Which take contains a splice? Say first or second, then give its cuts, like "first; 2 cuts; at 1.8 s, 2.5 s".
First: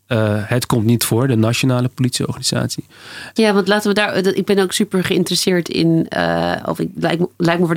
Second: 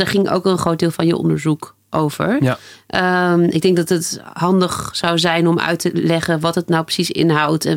first; 1 cut; at 3.4 s